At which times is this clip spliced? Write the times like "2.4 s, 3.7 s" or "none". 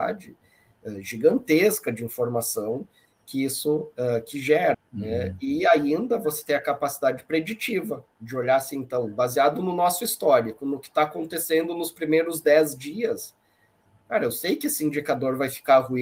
4.7 s